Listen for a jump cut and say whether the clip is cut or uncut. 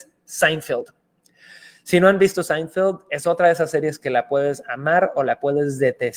uncut